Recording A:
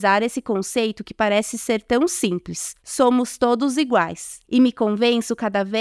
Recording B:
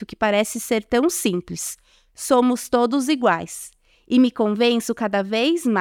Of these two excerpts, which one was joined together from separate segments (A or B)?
A